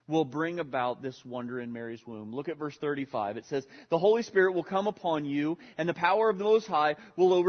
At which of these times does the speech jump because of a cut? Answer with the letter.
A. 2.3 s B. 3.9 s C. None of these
C